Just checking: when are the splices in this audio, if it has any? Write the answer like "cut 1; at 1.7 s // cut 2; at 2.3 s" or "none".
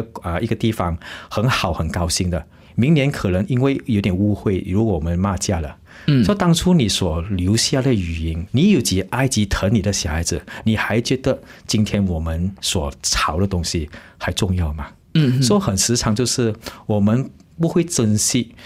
cut 1; at 8.5 s